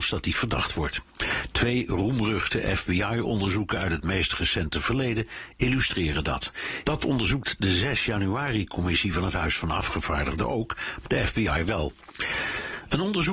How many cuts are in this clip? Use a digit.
2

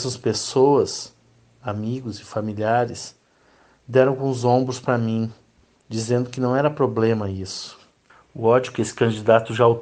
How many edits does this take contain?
0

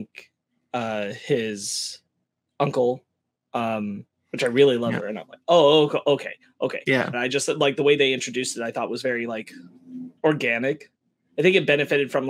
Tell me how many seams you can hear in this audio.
3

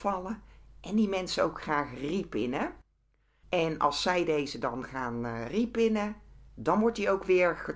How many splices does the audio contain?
1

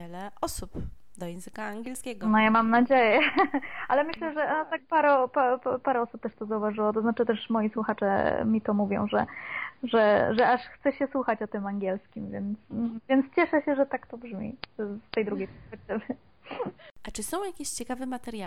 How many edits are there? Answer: 0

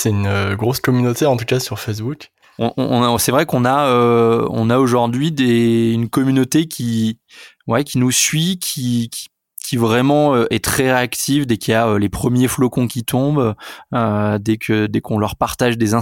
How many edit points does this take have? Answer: 0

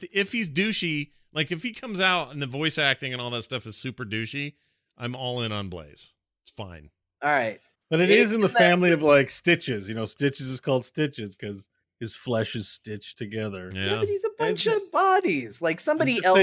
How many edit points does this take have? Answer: 0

